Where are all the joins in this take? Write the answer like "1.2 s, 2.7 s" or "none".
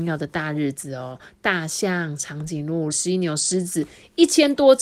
2.9 s